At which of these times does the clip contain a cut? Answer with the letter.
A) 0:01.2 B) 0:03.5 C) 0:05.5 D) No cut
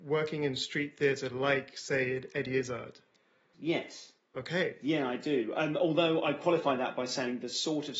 B